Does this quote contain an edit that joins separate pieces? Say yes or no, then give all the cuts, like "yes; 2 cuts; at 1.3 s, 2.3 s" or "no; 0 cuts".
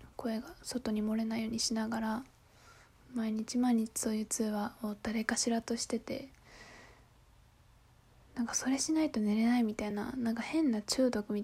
no; 0 cuts